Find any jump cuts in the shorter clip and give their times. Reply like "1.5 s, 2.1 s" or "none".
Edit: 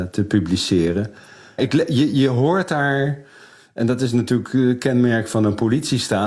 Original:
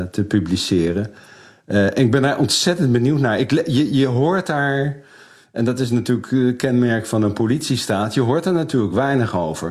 1.6 s